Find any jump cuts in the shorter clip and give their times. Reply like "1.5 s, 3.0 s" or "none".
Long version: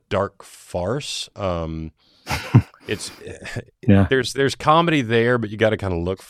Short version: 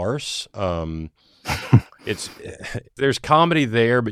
3.0 s